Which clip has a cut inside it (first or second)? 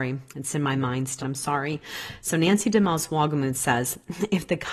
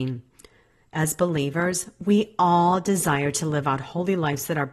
first